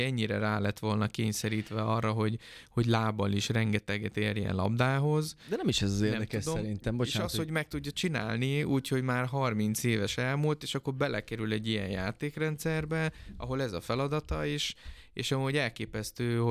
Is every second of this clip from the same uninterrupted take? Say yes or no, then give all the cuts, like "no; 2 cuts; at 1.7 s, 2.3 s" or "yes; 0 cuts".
yes; 0 cuts